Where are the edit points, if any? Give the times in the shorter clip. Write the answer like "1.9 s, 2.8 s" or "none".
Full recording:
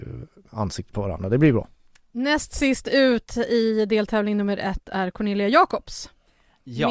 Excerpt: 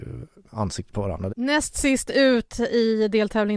1.3 s